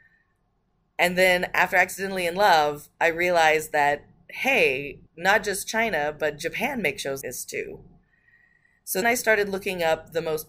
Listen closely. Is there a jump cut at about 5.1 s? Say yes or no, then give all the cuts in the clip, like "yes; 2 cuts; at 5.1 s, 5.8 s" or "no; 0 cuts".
yes; 3 cuts; at 5.1 s, 7.2 s, 9.0 s